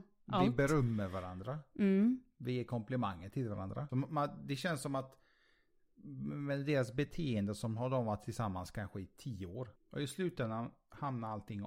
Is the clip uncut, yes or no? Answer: no